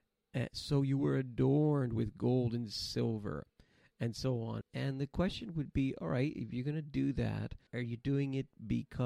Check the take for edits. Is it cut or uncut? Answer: cut